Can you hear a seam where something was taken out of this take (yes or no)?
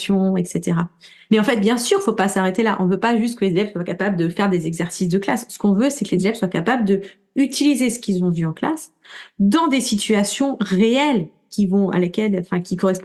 yes